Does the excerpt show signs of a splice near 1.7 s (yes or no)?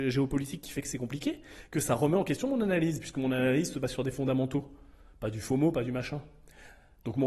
no